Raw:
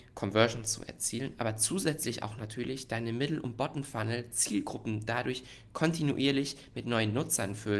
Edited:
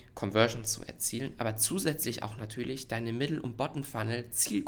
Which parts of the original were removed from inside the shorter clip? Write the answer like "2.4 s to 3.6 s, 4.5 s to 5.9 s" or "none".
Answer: none